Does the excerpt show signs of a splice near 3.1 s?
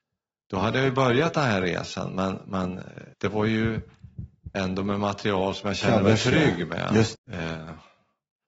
yes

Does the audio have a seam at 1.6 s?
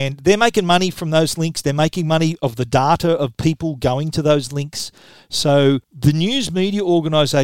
no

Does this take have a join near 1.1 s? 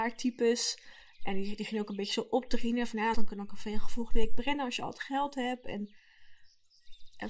no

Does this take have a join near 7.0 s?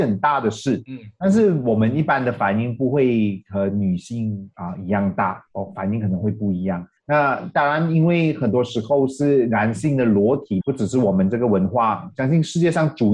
yes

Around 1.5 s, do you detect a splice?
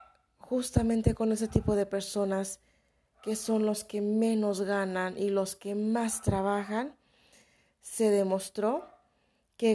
no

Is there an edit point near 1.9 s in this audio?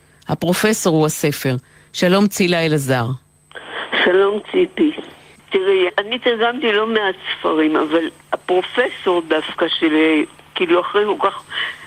no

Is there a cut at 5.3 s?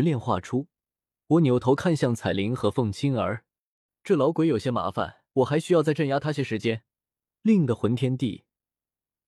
yes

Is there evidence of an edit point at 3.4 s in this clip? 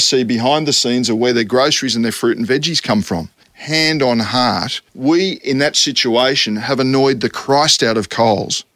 yes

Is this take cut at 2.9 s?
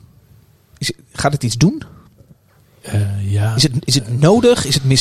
no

